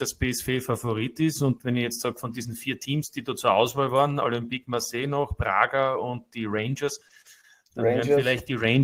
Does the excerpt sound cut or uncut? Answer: uncut